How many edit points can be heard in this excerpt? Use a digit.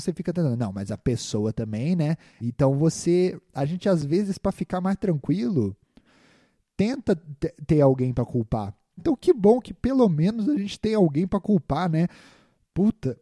2